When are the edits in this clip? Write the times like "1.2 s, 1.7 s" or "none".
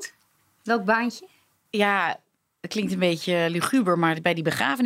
none